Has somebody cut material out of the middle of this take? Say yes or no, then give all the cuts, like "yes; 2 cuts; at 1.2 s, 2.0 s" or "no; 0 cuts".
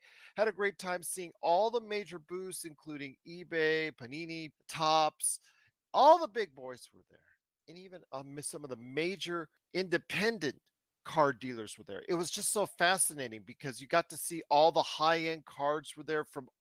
yes; 1 cut; at 4.5 s